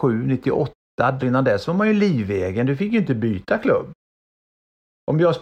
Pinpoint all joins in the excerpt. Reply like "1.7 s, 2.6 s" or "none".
1.2 s